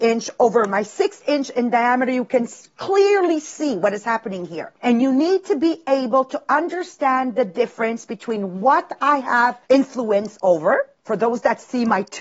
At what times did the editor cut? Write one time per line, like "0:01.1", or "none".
0:04.8
0:09.6
0:11.0